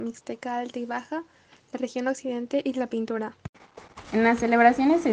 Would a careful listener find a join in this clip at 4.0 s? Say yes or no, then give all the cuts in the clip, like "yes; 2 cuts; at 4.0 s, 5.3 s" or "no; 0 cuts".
yes; 1 cut; at 4.0 s